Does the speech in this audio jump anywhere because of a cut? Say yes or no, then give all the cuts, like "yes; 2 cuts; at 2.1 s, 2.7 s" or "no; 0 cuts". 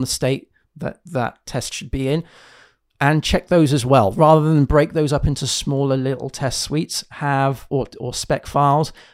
no; 0 cuts